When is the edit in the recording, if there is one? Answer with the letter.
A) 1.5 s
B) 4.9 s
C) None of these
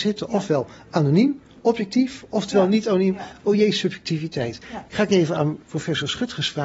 B